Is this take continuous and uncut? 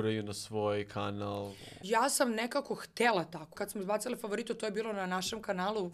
no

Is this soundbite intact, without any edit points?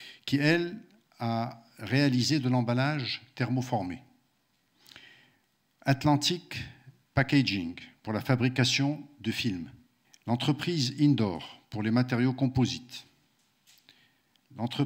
no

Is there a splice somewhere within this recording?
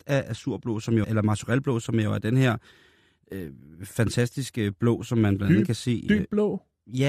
yes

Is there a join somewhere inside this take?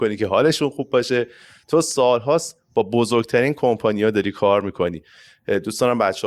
no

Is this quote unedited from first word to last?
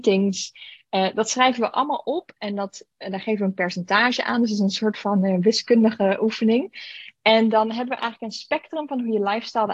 yes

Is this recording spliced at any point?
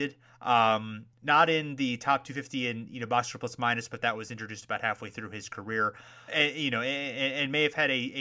yes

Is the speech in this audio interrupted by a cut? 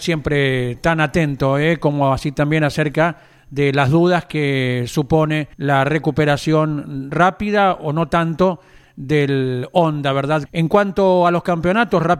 yes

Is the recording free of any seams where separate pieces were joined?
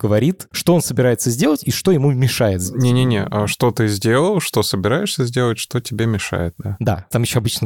yes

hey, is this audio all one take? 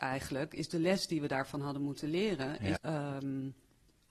no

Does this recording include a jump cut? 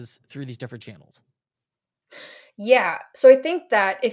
no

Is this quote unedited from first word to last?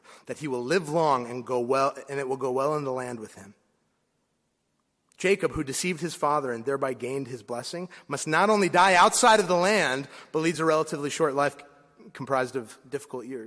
yes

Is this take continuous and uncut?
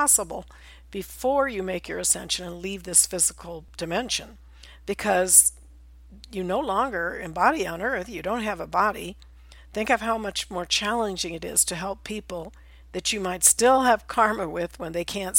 yes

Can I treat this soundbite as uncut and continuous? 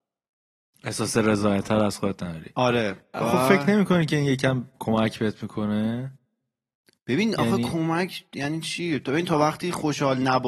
yes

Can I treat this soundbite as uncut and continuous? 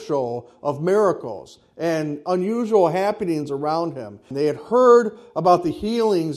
no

